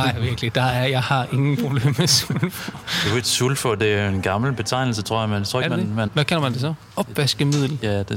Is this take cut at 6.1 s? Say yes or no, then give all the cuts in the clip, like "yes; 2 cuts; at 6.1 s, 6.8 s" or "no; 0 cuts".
yes; 1 cut; at 6.1 s